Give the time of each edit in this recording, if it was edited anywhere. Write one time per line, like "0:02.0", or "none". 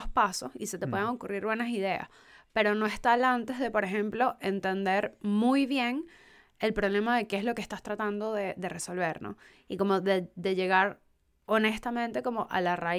none